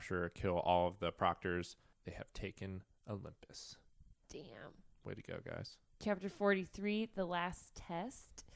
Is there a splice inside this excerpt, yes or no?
yes